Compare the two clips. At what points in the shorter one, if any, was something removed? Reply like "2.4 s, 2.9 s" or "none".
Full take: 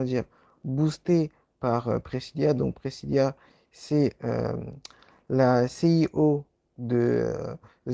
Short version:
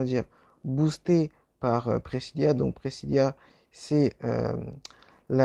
none